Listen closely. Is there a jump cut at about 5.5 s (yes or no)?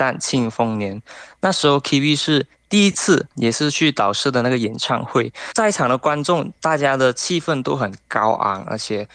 yes